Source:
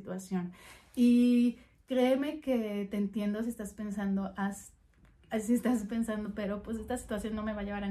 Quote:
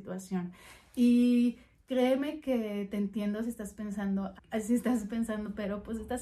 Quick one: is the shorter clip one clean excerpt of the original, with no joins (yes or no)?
no